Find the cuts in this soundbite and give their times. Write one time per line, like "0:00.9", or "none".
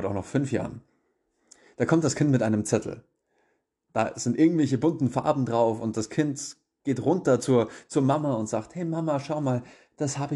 none